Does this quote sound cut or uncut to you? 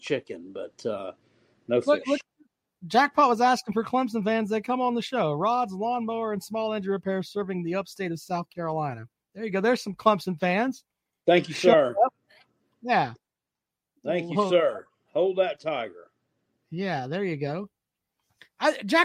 uncut